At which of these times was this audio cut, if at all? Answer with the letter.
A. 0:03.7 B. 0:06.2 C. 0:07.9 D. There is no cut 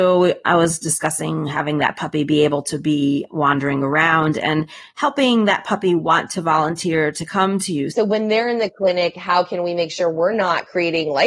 C